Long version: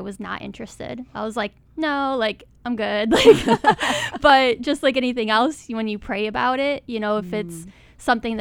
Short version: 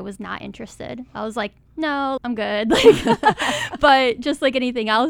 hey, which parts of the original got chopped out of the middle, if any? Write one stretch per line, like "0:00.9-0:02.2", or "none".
0:02.2-0:02.6